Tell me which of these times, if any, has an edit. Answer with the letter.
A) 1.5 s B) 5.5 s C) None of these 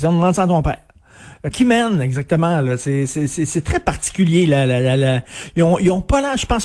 A